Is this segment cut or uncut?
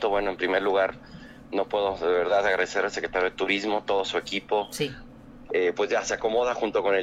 cut